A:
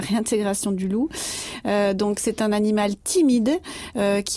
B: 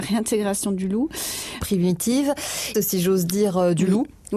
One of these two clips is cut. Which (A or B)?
B